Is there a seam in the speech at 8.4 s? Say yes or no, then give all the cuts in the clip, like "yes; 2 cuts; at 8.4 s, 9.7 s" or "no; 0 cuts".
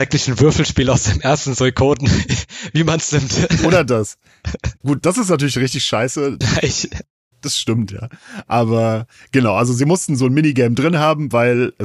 no; 1 cut; at 6.4 s